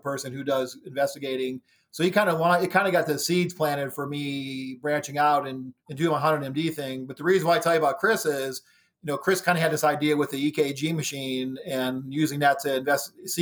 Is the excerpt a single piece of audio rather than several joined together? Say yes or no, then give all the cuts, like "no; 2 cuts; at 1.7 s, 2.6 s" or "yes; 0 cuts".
no; 1 cut; at 5.8 s